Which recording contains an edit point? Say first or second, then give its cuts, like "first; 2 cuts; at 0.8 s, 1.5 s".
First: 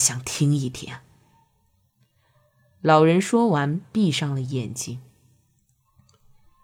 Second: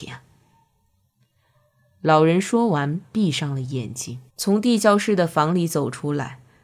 second; 1 cut; at 4.3 s